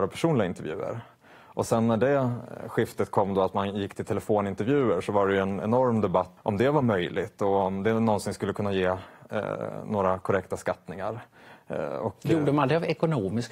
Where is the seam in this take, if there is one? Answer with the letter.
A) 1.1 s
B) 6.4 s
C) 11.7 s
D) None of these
B